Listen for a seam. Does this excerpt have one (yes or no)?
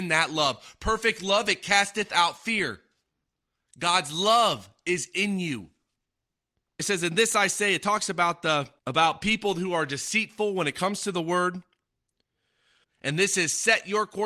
yes